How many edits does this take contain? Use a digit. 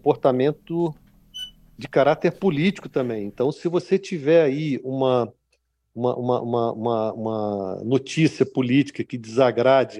0